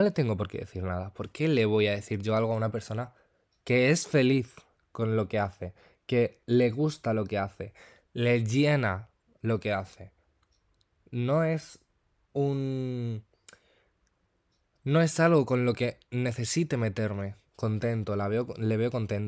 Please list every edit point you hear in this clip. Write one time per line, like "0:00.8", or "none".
0:17.4